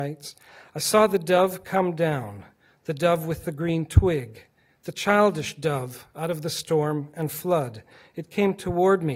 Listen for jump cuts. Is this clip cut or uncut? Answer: uncut